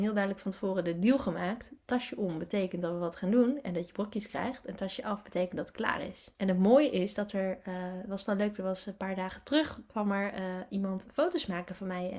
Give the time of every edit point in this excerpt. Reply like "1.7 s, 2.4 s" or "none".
6.3 s